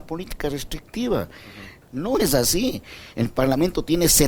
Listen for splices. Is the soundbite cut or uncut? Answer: cut